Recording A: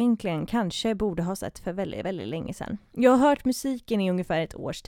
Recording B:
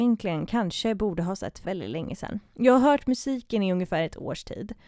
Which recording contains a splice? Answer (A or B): B